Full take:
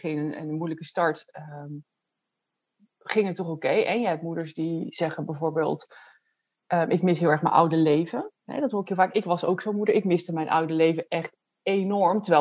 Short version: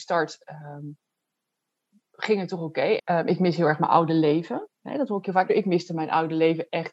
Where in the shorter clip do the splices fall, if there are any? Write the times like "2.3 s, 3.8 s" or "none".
3.0 s, 5.5 s

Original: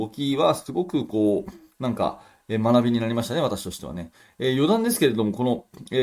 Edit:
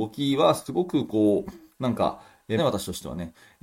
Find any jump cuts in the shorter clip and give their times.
2.6 s

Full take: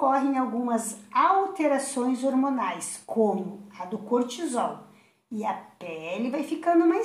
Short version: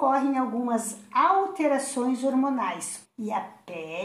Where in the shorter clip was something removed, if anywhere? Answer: 3.0 s

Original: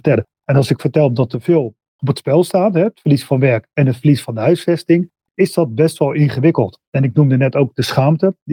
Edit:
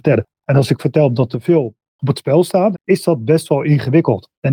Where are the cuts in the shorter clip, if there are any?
2.7 s

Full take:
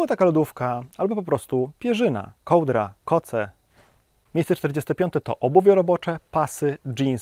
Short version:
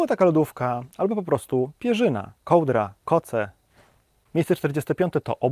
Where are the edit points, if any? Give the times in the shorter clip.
none

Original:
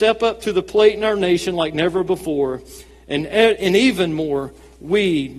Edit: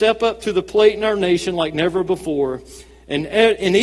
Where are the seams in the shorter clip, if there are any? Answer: none

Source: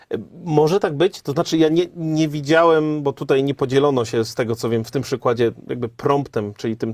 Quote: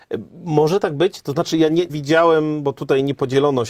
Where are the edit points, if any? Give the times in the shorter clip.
1.9 s

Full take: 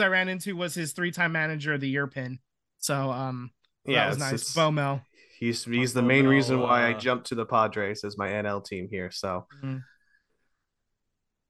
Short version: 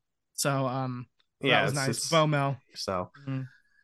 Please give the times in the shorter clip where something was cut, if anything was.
2.7 s

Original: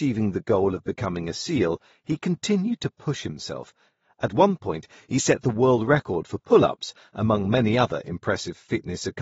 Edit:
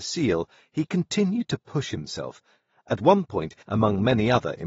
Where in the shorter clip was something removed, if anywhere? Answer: 3.6 s

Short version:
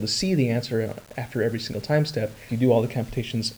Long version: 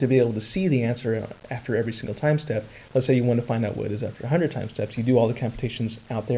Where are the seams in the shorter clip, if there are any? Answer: 2.5 s

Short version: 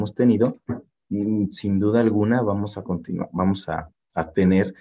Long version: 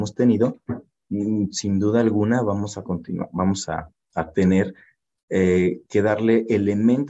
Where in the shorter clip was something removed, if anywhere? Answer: none

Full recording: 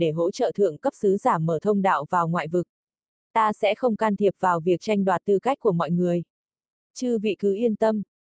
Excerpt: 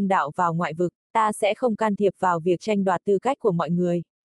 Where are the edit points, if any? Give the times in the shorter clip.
1.0 s

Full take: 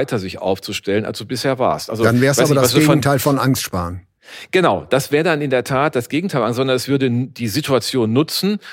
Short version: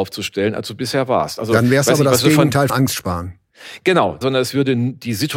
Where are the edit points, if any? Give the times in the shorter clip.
2.7 s, 4.2 s

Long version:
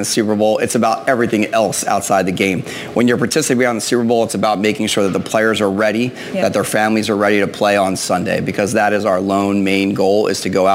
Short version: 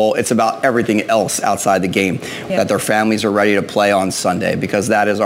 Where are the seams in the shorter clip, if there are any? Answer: 2.5 s

